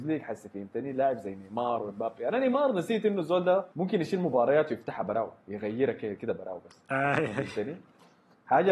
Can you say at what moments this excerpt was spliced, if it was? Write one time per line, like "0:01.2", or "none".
0:03.7